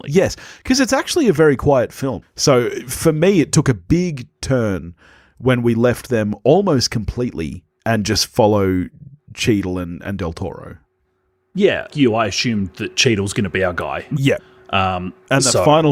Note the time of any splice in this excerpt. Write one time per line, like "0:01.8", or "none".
0:02.2
0:11.9
0:14.1